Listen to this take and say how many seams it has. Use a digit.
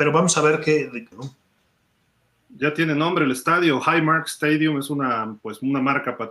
1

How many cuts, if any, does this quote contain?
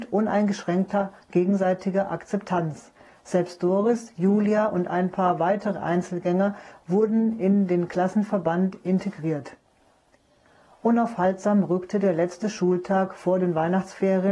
0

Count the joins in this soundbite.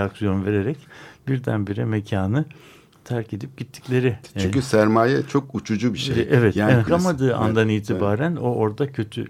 1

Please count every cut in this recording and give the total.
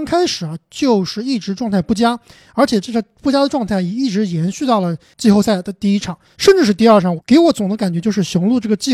1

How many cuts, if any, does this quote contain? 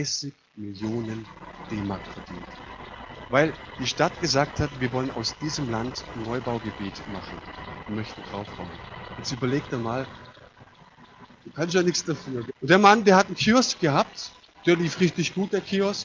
2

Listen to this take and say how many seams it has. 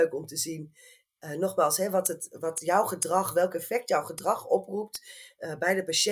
0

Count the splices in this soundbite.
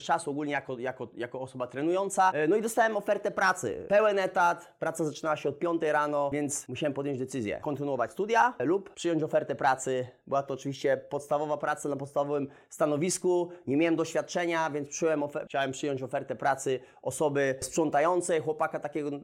0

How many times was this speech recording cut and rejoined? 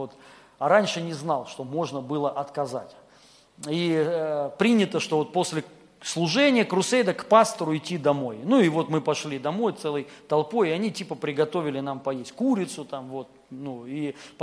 0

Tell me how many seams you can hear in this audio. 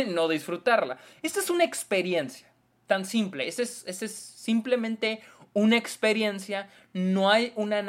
0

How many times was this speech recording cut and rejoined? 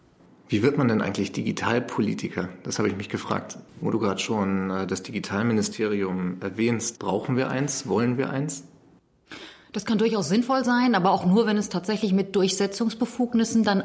2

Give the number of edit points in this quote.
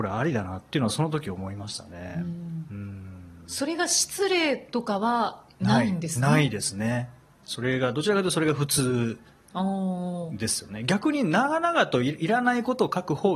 0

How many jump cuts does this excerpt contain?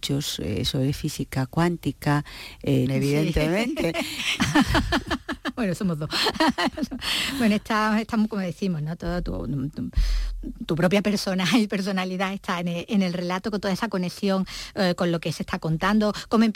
2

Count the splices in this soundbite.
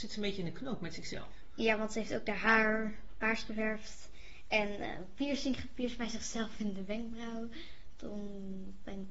0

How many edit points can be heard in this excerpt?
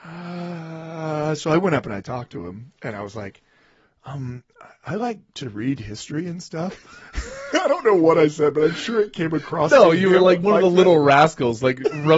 1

